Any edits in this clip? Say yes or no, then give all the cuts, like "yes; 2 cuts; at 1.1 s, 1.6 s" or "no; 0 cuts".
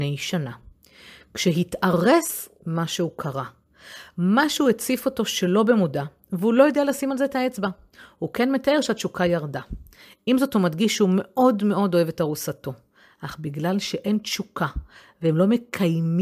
no; 0 cuts